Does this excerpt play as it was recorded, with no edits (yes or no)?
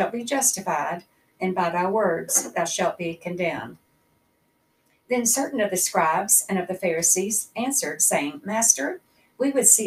yes